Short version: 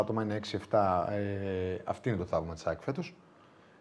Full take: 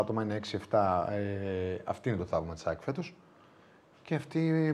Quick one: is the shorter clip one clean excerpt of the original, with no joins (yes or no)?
yes